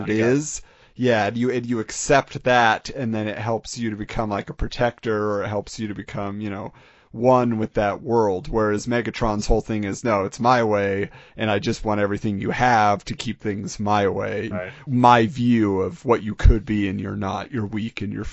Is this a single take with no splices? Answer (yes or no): no